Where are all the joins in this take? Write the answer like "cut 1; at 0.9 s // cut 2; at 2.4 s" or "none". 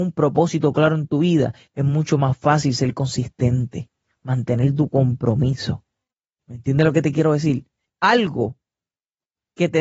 cut 1; at 7.9 s